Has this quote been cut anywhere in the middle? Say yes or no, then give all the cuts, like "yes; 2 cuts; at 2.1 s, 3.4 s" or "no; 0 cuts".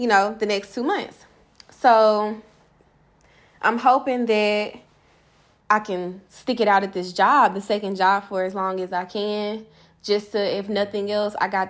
yes; 1 cut; at 5.6 s